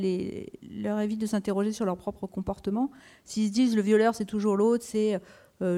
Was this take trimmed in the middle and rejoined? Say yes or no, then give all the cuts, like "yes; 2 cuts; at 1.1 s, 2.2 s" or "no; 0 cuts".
no; 0 cuts